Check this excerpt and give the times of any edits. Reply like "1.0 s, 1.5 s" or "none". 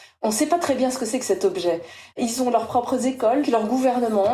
2.1 s, 3.4 s